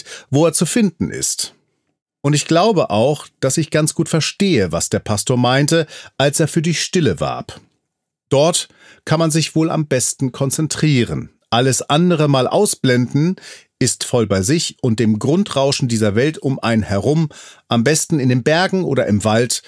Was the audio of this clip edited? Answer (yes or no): no